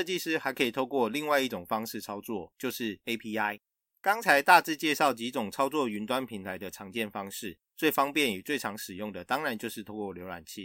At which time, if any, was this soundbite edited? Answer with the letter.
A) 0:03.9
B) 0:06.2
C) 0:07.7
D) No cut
D